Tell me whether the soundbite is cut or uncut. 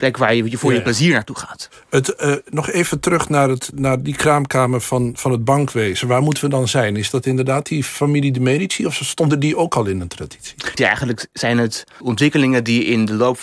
cut